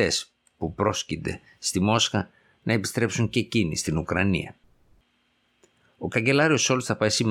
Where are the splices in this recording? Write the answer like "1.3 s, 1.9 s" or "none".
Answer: none

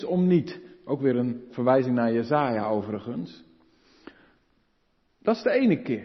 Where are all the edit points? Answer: none

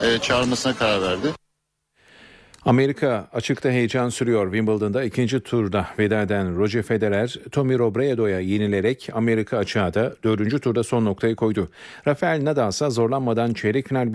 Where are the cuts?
none

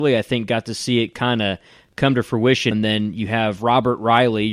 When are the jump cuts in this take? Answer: 2.7 s

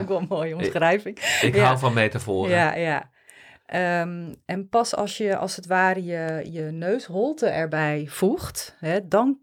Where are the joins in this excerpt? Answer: none

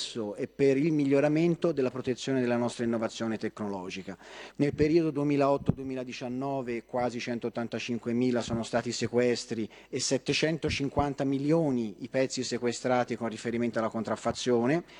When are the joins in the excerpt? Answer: 4.5 s

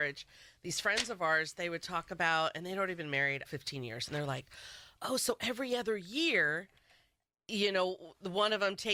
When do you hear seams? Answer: 3.4 s

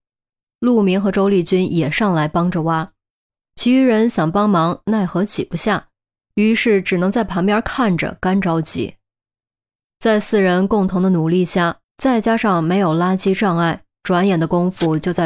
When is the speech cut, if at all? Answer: 11.8 s

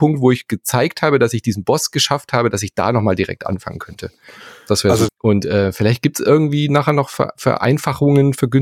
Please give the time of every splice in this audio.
5.1 s

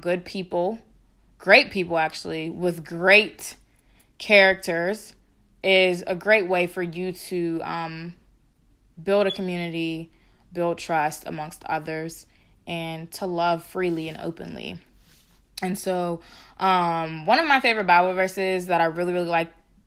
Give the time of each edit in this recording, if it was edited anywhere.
none

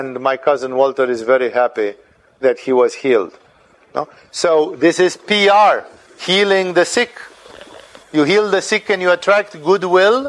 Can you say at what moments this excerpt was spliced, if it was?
8.0 s

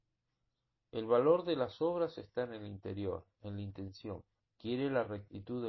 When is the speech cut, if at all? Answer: 4.4 s

